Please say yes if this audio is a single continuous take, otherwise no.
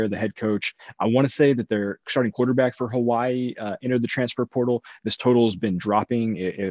yes